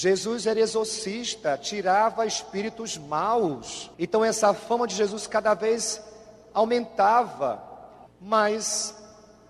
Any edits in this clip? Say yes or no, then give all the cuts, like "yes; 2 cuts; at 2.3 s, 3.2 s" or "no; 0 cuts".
yes; 2 cuts; at 3.9 s, 8.1 s